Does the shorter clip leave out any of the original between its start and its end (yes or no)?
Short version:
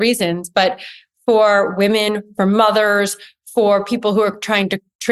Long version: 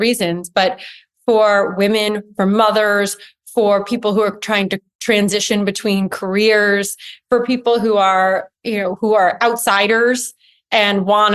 no